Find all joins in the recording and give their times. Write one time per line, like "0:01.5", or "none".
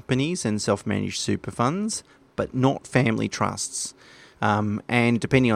0:04.3